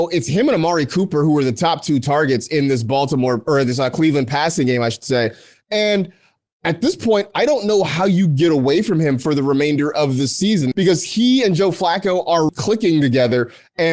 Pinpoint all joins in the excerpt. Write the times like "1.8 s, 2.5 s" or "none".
10.7 s, 12.5 s

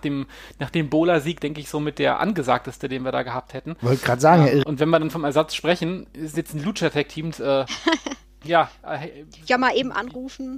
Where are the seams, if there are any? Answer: 4.6 s, 7.3 s

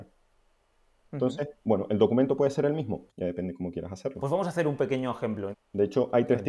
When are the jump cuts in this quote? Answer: 3.1 s, 5.5 s

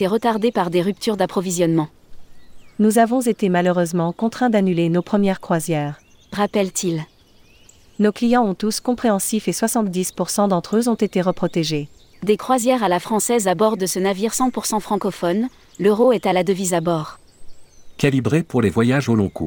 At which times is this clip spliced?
12.1 s

